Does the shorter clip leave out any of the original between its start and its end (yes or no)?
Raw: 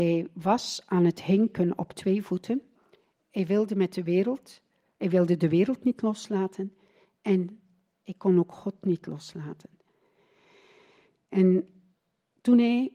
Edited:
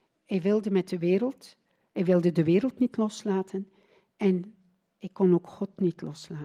no